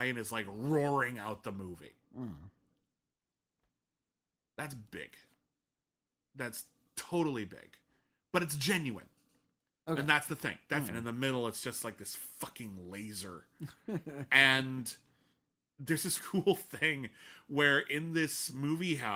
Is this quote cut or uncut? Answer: cut